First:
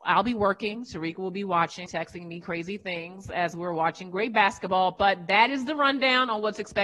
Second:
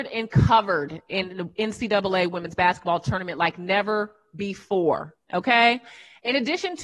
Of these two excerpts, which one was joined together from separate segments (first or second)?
first